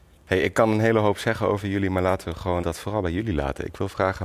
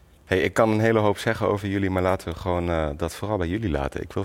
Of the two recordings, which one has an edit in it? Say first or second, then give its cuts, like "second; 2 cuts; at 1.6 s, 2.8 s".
first; 1 cut; at 2.6 s